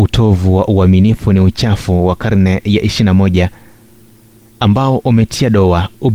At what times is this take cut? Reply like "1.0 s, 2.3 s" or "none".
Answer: none